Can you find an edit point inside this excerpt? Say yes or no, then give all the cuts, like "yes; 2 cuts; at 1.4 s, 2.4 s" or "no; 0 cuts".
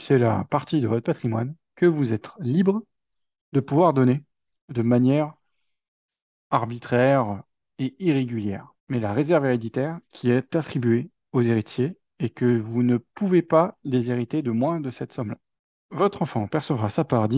yes; 2 cuts; at 8.8 s, 10.0 s